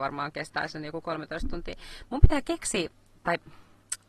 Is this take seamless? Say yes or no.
yes